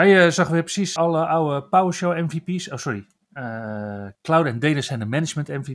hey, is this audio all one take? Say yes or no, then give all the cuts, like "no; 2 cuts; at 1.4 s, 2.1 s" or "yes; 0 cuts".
no; 1 cut; at 1.0 s